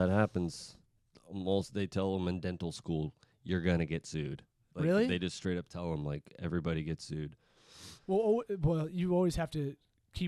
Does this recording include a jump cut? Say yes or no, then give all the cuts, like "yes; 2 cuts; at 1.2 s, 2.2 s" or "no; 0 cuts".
yes; 1 cut; at 8.0 s